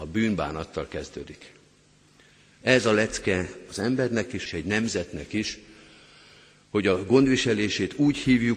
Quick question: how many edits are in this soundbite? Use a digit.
2